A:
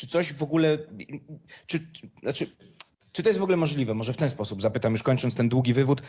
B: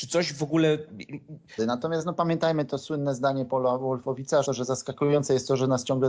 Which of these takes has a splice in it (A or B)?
B